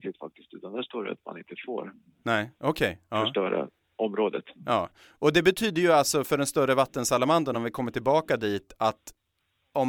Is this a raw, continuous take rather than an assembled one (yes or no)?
yes